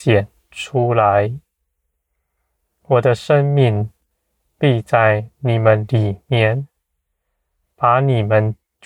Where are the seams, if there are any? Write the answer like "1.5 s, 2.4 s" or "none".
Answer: none